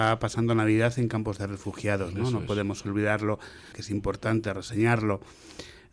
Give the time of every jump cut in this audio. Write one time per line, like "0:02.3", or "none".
0:03.7